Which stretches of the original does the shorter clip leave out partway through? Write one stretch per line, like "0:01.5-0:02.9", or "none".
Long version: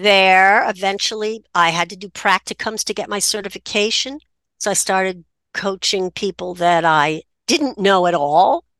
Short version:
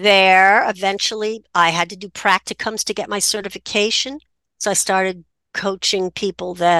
none